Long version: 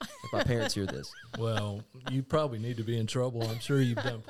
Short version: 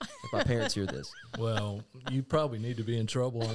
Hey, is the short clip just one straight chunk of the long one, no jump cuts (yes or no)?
yes